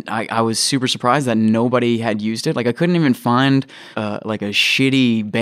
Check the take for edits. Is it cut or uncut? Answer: cut